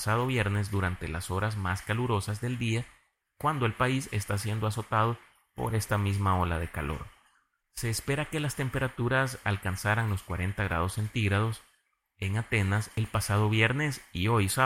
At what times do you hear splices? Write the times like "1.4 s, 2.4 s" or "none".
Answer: 7.6 s